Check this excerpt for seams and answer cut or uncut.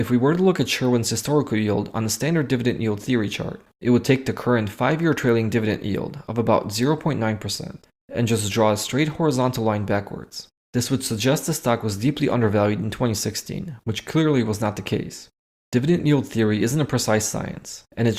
uncut